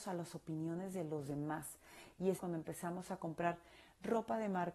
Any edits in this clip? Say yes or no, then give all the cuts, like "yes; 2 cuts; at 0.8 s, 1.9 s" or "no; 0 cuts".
yes; 1 cut; at 2.4 s